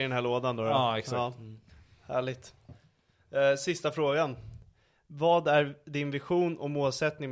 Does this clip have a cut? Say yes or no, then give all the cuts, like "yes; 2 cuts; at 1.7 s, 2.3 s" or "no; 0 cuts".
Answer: no; 0 cuts